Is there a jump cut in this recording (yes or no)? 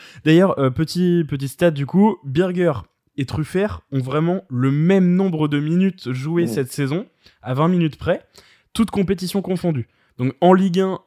no